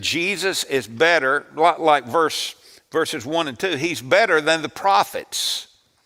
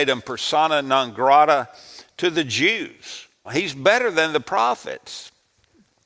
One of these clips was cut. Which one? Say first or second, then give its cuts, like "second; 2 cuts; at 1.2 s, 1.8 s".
second; 1 cut; at 3.4 s